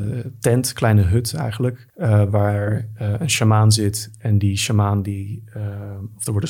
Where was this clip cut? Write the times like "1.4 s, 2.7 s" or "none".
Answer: 1.9 s